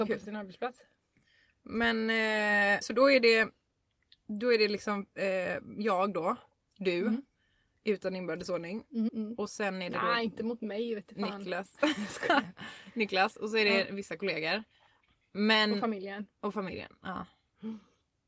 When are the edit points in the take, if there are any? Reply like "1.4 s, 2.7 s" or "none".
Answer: 2.8 s, 9.1 s

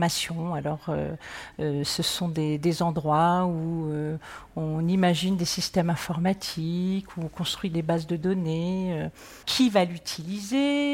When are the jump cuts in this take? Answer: 9.4 s

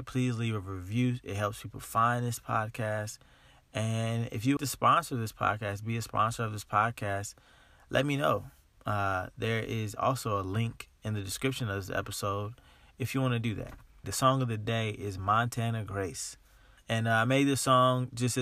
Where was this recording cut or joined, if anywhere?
4.6 s, 14.0 s, 16.8 s

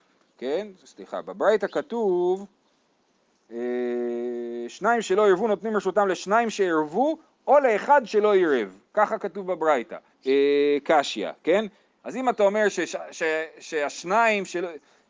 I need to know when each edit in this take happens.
10.1 s, 12.0 s

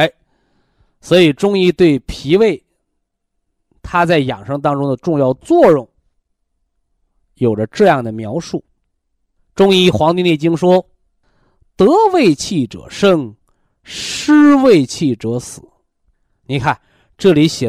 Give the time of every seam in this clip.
none

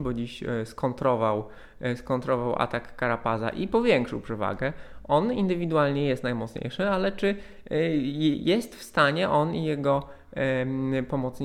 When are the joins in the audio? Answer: none

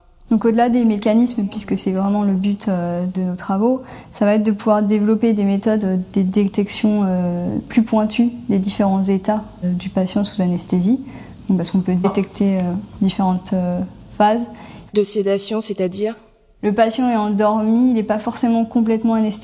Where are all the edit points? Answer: 14.9 s

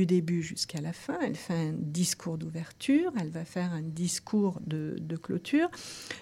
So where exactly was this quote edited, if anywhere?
none

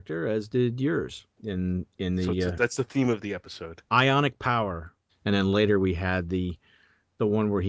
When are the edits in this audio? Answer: 1.3 s, 5.1 s

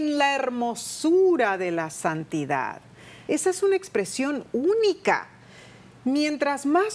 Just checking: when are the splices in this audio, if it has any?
3.3 s

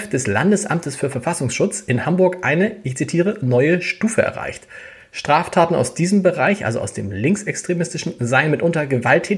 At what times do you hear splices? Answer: none

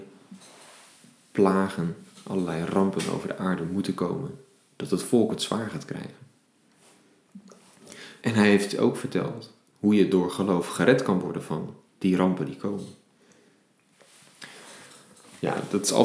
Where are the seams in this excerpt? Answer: 8.2 s

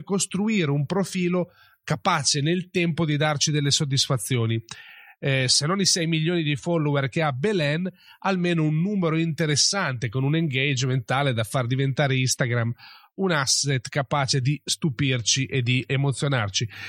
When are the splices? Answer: none

